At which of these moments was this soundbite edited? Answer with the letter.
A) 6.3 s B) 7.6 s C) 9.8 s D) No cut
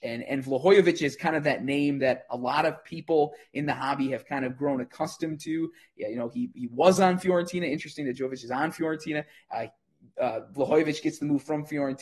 D